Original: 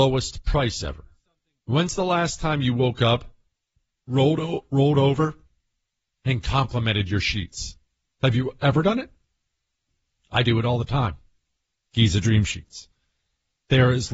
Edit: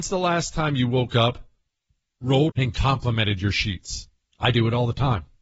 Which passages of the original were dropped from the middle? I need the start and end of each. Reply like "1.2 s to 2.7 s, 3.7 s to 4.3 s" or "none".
4.4 s to 6.2 s, 8.0 s to 10.2 s